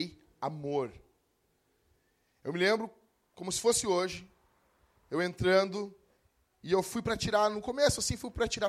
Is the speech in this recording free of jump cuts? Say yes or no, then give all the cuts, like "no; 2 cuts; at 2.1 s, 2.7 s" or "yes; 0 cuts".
yes; 0 cuts